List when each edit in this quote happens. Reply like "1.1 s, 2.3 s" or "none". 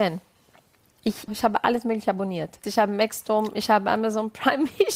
1.3 s, 2.6 s